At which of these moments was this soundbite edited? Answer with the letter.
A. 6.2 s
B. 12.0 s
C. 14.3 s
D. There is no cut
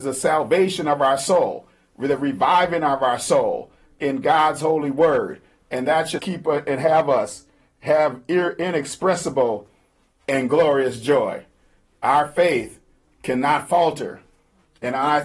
A